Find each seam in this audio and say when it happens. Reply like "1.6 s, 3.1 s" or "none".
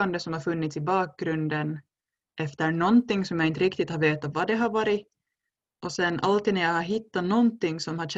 none